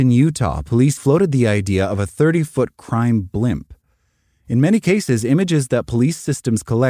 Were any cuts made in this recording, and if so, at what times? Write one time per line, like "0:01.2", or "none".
0:01.0